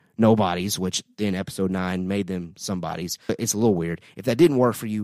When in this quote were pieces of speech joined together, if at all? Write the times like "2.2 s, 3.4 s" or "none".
3.3 s